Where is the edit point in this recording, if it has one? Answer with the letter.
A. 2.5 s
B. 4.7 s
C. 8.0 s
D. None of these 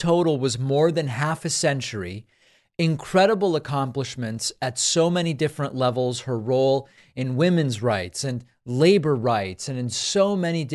D